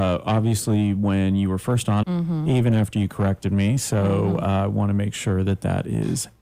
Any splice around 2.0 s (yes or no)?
yes